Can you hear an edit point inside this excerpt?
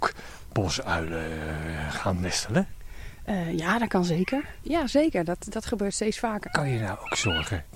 yes; 2 cuts; at 4.6 s, 6.4 s

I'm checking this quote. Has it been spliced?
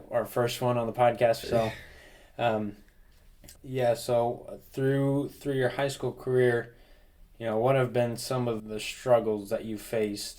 yes; 3 cuts; at 1.4 s, 3.6 s, 8.6 s

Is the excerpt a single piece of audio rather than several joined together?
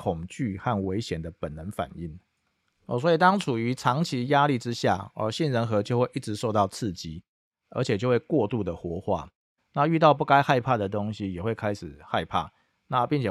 no; 1 cut; at 9.6 s

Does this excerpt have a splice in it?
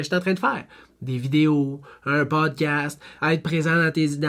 no; 0 cuts

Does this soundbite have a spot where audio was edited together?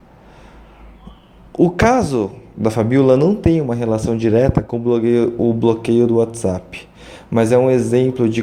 no; 0 cuts

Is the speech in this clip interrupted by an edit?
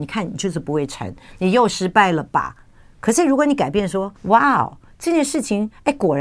yes; 1 cut; at 4.1 s

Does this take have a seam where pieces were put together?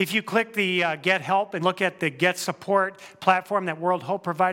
yes; 1 cut; at 1.6 s

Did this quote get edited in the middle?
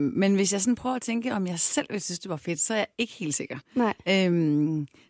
no; 0 cuts

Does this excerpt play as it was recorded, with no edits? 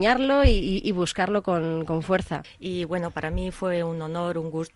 no; 1 cut; at 2.4 s

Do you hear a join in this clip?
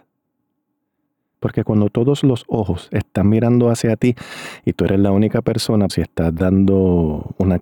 yes; 1 cut; at 5.9 s

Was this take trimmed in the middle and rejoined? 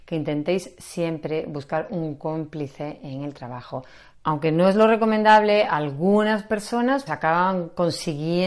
yes; 2 cuts; at 4.1 s, 7.1 s

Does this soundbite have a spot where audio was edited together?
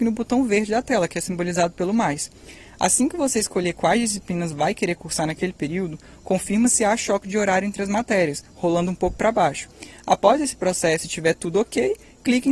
no; 0 cuts

